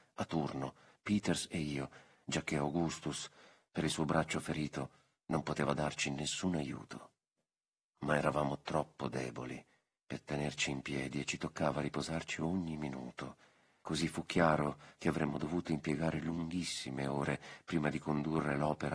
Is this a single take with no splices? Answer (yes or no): yes